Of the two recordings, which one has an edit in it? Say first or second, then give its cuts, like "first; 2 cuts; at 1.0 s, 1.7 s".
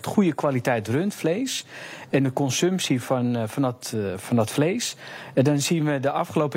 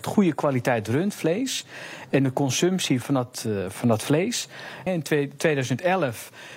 second; 2 cuts; at 3.0 s, 4.9 s